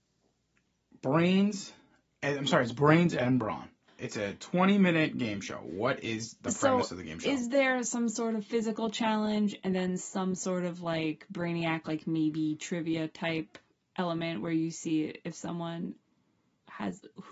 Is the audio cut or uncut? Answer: cut